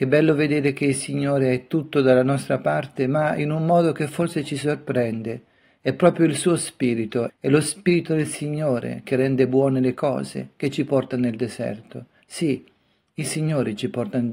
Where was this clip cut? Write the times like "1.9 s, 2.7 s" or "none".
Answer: 7.3 s

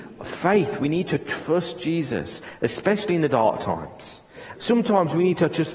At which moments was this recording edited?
4.5 s

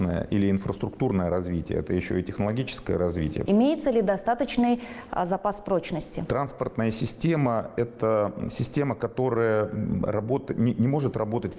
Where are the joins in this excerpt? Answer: 3.5 s

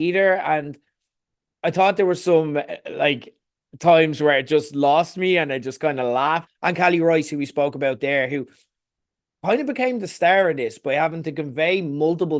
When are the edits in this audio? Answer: 6.5 s

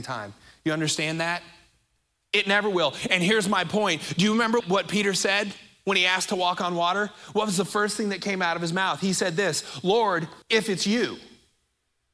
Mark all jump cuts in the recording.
4.6 s, 10.4 s

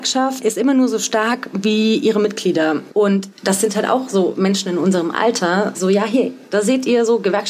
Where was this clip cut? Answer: 2.9 s, 5.7 s

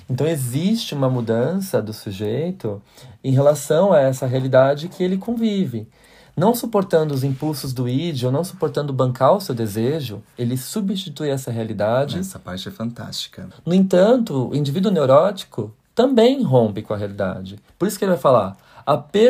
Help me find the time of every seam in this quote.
13.5 s

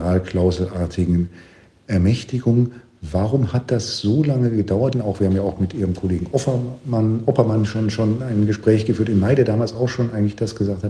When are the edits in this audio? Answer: 4.9 s

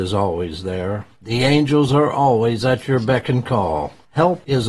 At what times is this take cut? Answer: none

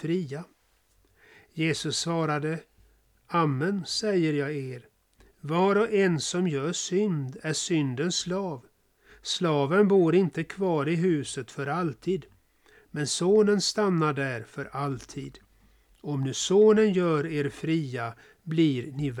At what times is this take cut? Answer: none

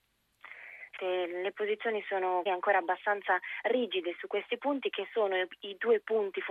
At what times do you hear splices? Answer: 1.0 s, 2.5 s

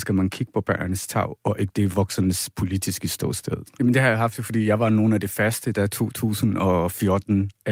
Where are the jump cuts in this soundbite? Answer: 3.8 s

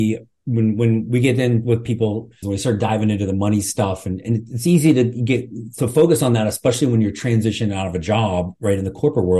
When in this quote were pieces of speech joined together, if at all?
2.4 s

